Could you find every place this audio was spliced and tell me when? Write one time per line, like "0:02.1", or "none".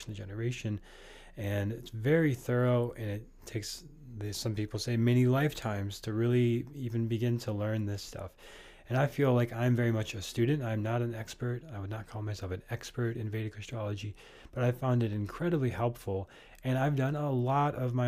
none